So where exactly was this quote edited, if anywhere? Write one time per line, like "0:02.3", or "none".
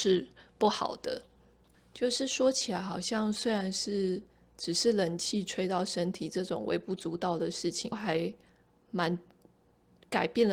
0:01.7
0:07.9

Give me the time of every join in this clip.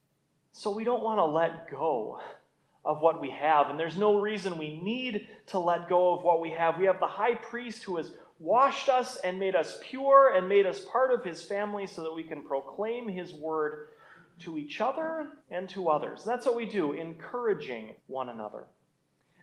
0:15.4
0:18.0

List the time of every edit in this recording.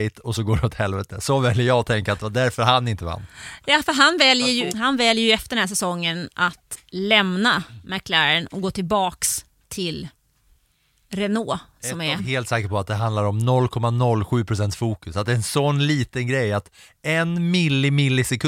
0:04.7
0:12.2

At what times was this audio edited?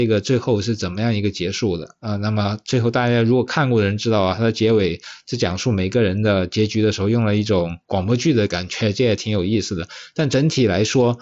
none

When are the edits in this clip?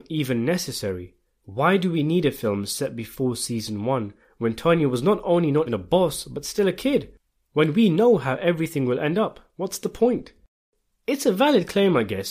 0:05.7

